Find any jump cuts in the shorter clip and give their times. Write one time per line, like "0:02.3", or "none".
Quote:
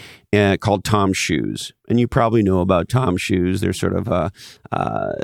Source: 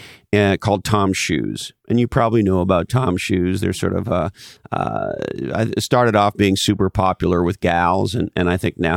none